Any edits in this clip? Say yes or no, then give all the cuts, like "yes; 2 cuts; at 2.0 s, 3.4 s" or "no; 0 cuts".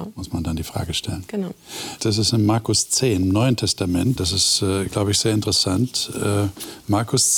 yes; 2 cuts; at 2.0 s, 4.2 s